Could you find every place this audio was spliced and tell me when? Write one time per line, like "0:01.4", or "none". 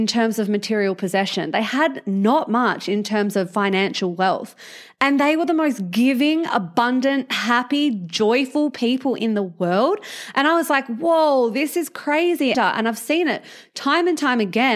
0:12.5